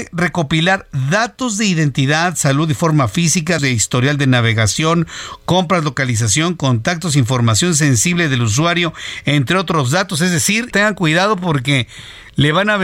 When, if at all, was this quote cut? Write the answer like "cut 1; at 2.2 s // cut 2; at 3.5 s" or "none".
cut 1; at 3.6 s // cut 2; at 10.7 s